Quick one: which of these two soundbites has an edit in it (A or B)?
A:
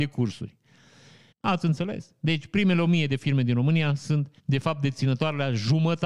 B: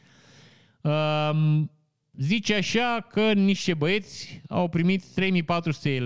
A